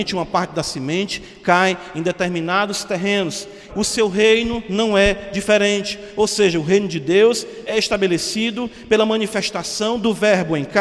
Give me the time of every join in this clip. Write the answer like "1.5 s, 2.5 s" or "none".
3.7 s